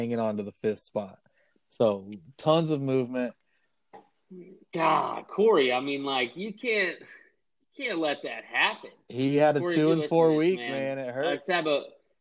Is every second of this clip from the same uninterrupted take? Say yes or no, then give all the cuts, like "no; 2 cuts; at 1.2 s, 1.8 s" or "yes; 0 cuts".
yes; 0 cuts